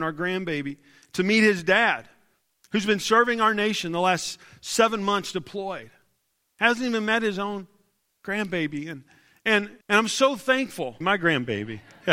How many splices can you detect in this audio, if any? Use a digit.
2